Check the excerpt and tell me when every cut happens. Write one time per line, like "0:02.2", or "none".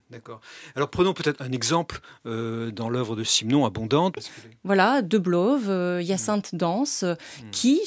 0:04.2